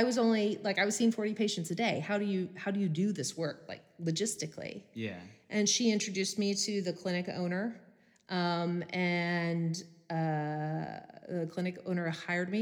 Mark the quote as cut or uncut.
uncut